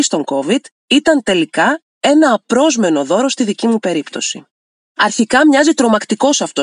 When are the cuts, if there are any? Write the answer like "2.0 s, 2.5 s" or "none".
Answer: none